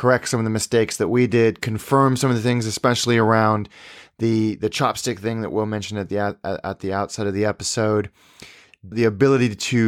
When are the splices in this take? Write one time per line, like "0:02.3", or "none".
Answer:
0:08.9